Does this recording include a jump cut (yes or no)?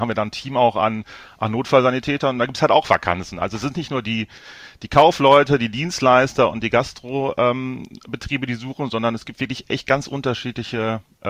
no